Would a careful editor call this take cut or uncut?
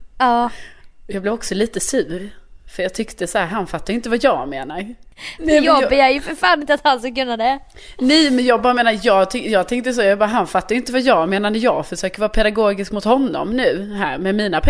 cut